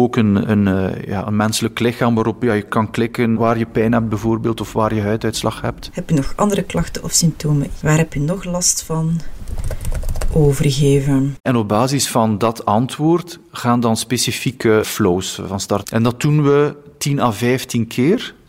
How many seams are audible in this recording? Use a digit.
3